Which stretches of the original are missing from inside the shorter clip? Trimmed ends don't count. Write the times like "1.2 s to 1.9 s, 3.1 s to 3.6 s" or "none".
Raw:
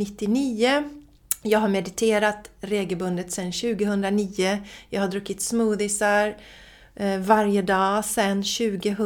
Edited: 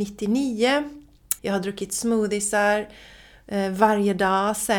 1.4 s to 4.9 s